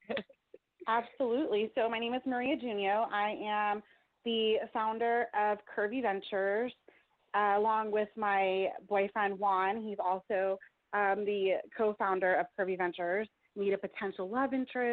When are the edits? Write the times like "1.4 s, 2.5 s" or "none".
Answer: 13.5 s

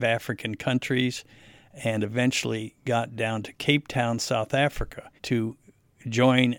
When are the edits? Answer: 5.2 s

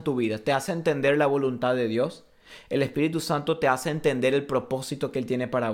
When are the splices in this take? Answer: none

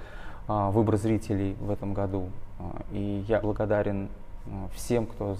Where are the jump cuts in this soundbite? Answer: 3.4 s

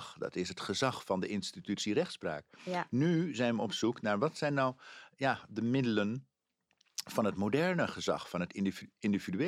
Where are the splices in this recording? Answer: none

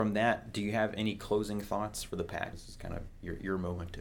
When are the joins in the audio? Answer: 2.5 s

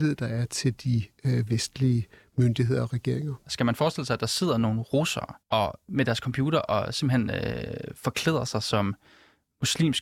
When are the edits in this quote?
3.4 s, 5.4 s

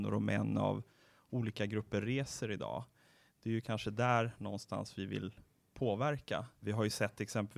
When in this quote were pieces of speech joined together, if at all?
6.6 s

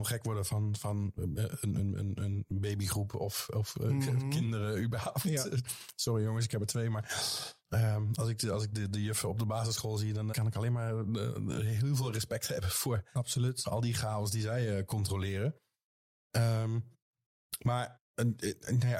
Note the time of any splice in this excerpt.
10.3 s

